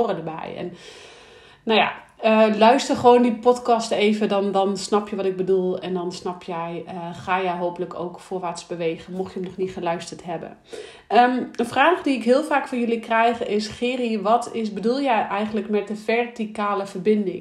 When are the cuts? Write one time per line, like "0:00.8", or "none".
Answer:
none